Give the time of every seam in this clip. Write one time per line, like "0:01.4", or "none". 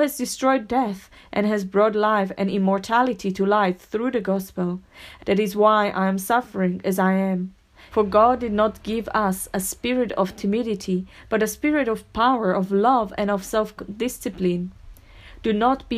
0:05.2
0:07.9